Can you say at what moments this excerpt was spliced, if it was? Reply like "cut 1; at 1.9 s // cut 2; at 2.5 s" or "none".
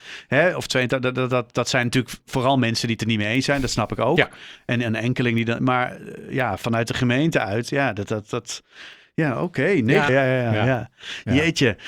cut 1; at 10.1 s